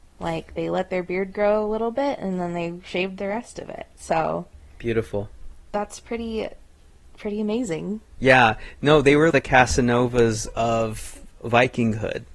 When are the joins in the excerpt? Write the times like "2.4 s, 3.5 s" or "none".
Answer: 8.2 s, 9.3 s

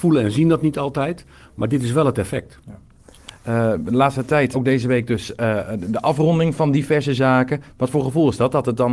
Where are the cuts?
4.5 s, 7.7 s

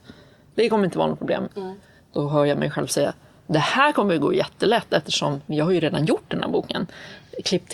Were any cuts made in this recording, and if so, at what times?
1.5 s, 5.5 s

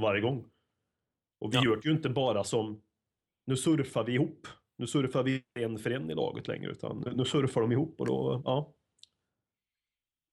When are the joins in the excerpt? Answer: none

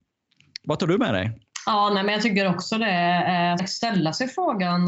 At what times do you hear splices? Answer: 3.6 s

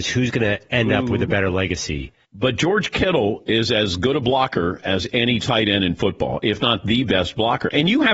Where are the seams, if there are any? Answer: 2.2 s

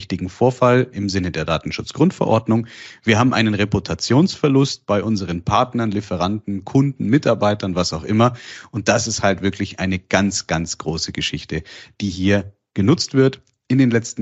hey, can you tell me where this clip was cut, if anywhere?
none

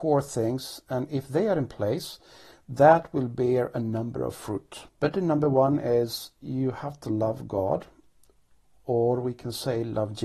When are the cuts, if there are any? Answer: 4.9 s

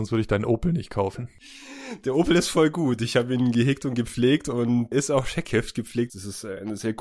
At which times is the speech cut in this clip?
4.9 s, 6.1 s

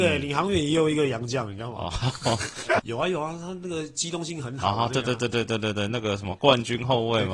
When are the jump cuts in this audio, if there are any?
2.8 s

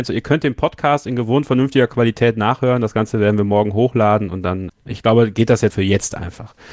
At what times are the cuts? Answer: 4.7 s, 5.7 s

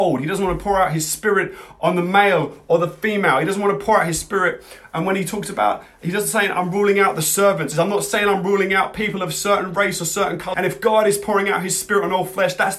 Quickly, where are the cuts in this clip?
7.7 s, 10.5 s

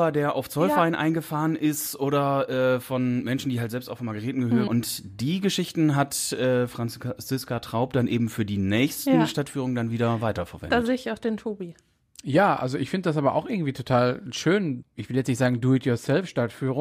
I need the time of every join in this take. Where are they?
4.7 s, 14.8 s

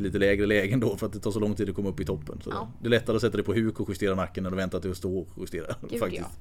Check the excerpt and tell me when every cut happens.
none

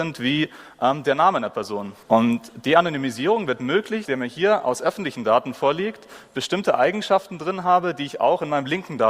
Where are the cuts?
2.0 s, 4.0 s

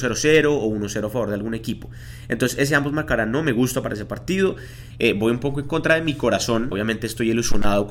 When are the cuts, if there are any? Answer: 4.9 s, 6.7 s

